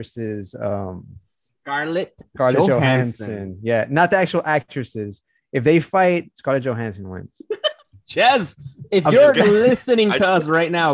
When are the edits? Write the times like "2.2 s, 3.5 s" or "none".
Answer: none